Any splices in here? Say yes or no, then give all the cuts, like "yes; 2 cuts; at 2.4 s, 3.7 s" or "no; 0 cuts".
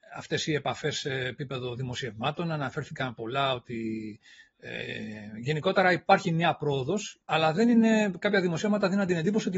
yes; 1 cut; at 7.2 s